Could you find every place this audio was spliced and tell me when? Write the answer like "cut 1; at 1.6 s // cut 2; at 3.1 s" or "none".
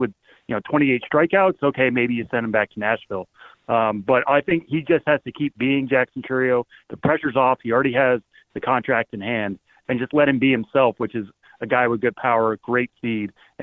none